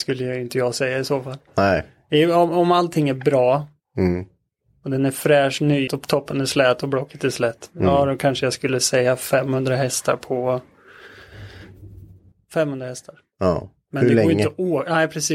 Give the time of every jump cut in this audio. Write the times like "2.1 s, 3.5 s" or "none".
5.9 s, 12.3 s